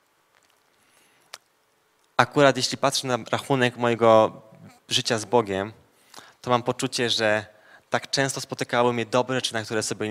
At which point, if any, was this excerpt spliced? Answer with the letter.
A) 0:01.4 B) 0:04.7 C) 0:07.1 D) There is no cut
D